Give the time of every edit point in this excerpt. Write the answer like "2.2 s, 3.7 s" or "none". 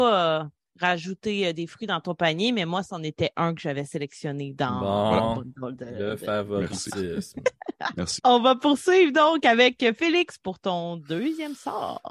8.2 s